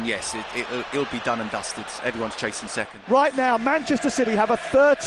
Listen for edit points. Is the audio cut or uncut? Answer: uncut